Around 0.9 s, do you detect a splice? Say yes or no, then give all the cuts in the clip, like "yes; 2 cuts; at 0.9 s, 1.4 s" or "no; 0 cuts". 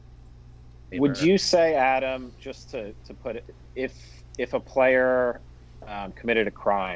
yes; 1 cut; at 0.9 s